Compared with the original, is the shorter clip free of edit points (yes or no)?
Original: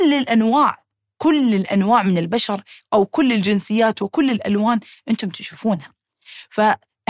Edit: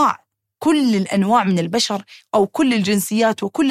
yes